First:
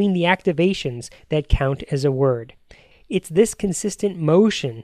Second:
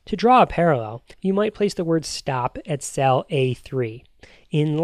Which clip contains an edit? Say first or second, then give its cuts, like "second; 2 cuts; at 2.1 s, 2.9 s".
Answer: second; 1 cut; at 1.1 s